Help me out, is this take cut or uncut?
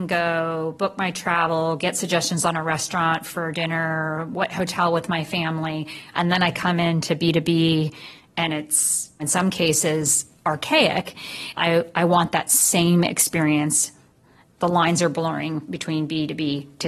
cut